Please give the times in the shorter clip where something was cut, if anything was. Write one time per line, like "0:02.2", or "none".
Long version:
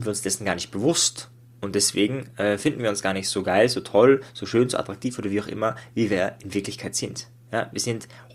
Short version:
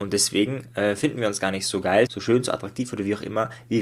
0:02.1